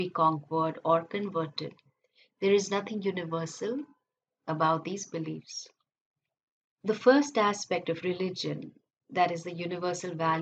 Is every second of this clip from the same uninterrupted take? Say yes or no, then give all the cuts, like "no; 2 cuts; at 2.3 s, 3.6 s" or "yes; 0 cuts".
yes; 0 cuts